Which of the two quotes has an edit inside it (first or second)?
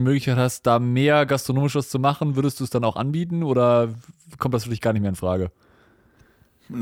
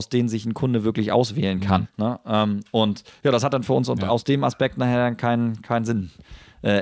second